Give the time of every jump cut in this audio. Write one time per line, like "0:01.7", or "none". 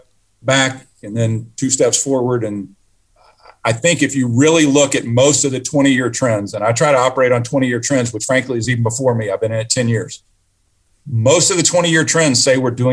none